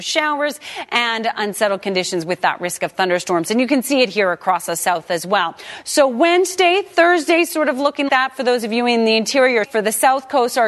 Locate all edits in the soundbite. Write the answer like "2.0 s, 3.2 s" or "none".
8.1 s, 9.7 s